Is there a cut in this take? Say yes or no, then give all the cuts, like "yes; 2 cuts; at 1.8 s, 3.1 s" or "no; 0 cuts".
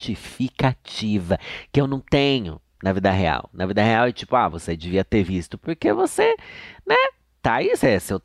no; 0 cuts